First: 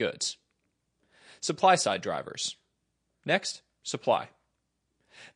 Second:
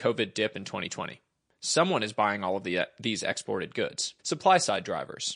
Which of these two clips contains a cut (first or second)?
second